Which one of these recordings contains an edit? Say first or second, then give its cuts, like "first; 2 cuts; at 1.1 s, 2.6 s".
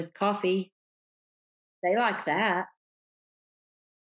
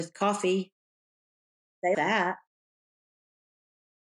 second; 1 cut; at 1.9 s